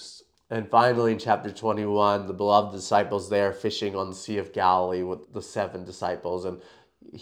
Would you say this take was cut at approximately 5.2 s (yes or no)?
yes